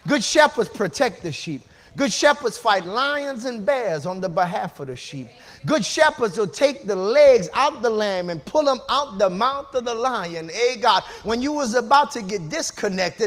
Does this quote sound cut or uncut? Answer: uncut